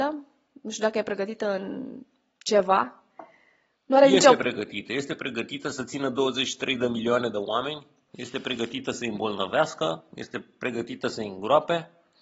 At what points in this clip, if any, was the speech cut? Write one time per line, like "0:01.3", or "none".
none